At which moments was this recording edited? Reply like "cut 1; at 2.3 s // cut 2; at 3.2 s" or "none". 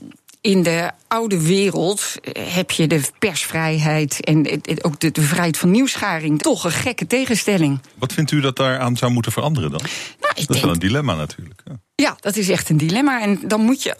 cut 1; at 6.4 s